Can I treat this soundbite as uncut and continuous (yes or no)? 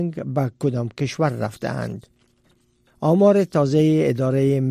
yes